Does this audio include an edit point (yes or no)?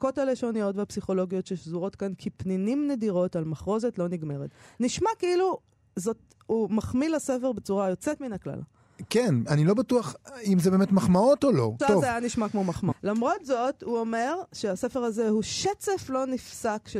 yes